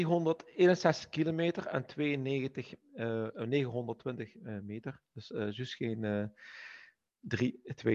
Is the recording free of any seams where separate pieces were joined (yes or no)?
yes